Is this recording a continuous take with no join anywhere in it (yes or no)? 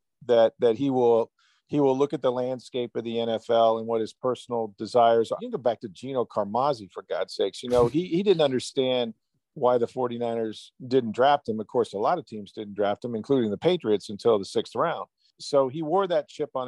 no